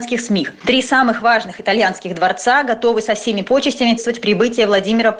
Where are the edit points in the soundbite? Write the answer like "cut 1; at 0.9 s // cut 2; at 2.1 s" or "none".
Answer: cut 1; at 4.0 s